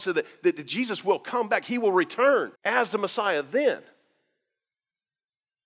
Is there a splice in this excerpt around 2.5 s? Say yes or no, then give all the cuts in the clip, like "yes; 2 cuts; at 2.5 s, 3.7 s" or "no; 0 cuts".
yes; 1 cut; at 2.5 s